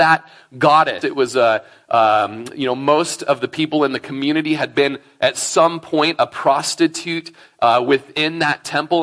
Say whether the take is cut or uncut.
cut